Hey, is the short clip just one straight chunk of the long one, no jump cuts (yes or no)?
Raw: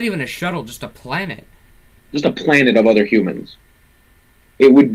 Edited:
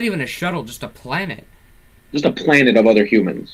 yes